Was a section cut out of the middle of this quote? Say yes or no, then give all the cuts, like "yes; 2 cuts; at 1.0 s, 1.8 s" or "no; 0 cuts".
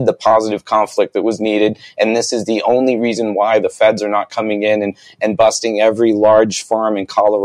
no; 0 cuts